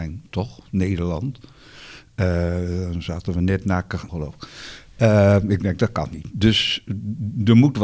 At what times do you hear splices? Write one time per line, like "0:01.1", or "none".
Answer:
0:04.1